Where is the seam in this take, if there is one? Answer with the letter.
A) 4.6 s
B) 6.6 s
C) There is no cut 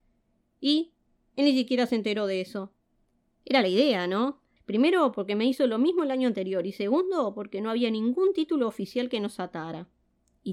A